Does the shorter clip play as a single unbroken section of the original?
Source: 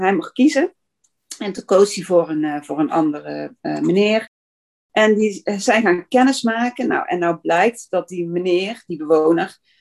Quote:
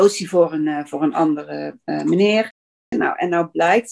no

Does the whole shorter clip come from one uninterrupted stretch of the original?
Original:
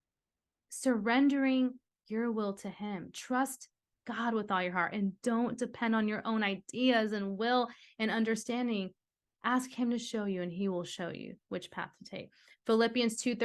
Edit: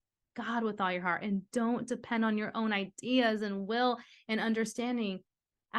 yes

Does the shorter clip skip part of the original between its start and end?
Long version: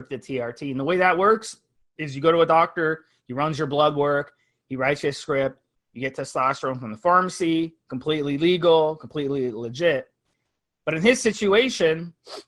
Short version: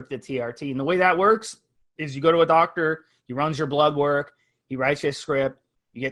no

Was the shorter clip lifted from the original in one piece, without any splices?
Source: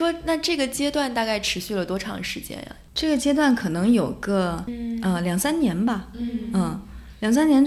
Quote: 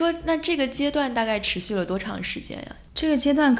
yes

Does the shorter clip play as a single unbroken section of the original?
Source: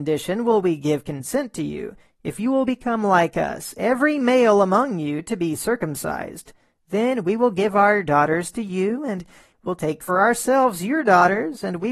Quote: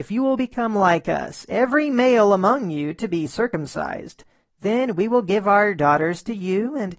yes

